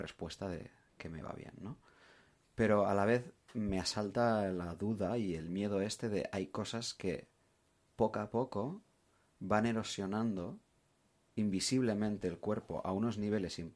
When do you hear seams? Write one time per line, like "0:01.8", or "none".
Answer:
none